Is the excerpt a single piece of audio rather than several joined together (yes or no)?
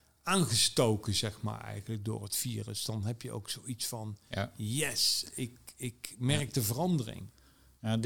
yes